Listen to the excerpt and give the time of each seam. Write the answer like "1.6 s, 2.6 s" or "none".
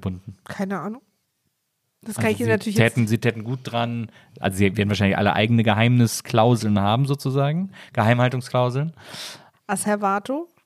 9.5 s